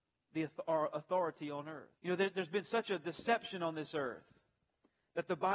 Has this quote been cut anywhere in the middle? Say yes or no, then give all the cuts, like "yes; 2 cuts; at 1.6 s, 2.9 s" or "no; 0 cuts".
yes; 1 cut; at 2.0 s